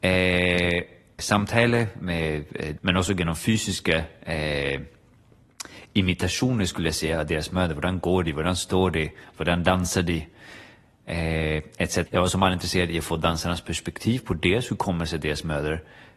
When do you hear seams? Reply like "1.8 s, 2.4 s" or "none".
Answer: 1.2 s, 2.8 s, 12.1 s